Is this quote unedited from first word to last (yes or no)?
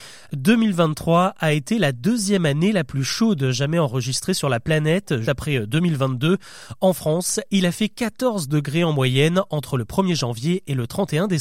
no